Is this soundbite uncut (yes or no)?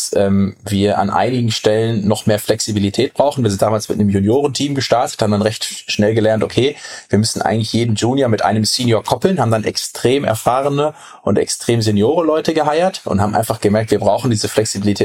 yes